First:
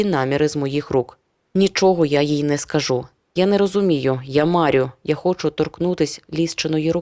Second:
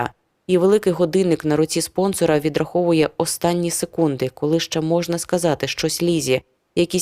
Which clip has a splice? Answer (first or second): first